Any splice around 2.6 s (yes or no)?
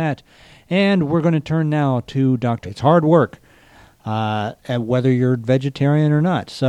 yes